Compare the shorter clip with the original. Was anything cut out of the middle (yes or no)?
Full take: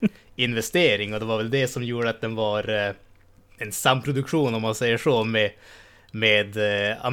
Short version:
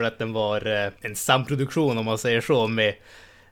yes